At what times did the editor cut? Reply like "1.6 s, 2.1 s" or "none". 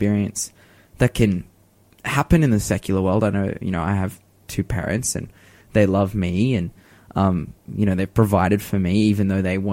none